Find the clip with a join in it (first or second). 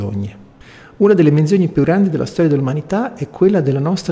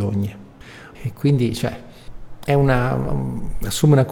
second